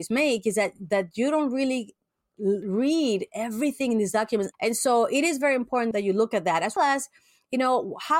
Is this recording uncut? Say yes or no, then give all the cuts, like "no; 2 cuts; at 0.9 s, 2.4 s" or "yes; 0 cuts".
no; 2 cuts; at 4.5 s, 6.8 s